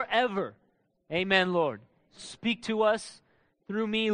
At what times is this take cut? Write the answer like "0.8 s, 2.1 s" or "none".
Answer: 2.2 s